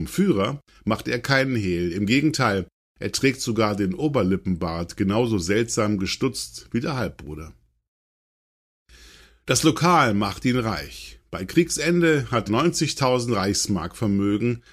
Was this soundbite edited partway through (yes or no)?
yes